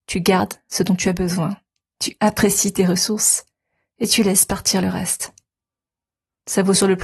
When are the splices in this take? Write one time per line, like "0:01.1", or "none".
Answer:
none

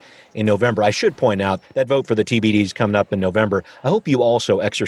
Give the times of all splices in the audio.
0:01.6

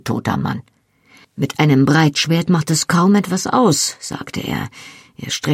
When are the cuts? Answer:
0:01.2

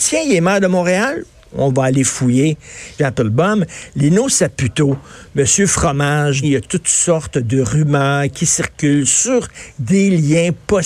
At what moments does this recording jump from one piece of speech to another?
0:03.0
0:06.4

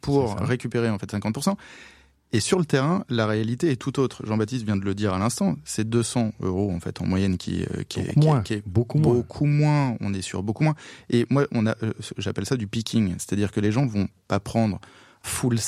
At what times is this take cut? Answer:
none

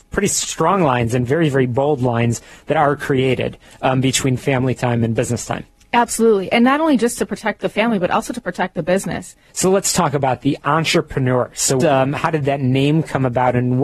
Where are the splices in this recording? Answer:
0:09.5
0:11.8

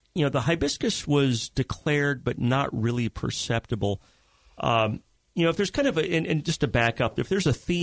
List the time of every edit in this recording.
none

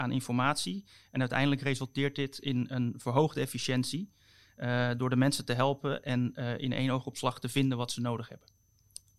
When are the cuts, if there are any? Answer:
none

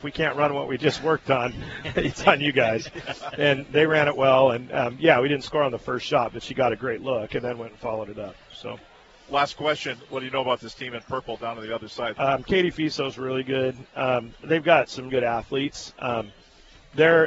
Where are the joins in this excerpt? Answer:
0:12.1
0:15.1

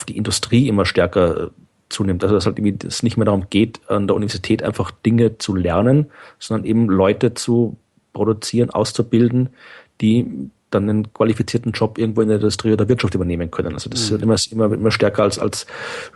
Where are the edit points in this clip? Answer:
0:10.6

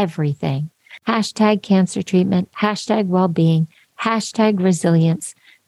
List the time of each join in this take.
0:02.5

